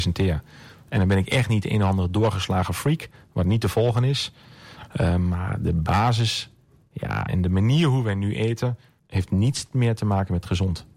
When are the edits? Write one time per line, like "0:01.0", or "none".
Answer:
0:07.3
0:09.0